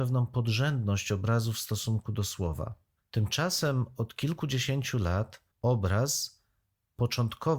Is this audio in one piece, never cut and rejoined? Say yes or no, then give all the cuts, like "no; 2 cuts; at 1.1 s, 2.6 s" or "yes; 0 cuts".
no; 2 cuts; at 3.0 s, 5.5 s